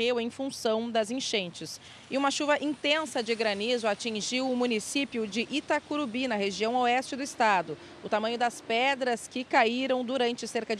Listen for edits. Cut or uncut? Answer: uncut